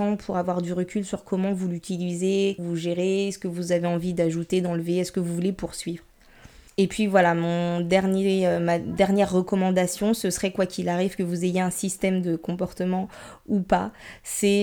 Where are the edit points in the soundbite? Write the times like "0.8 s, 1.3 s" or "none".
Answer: 2.6 s